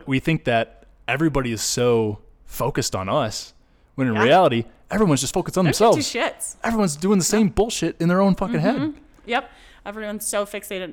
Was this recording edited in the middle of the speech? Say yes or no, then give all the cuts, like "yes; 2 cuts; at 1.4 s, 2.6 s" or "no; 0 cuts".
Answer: no; 0 cuts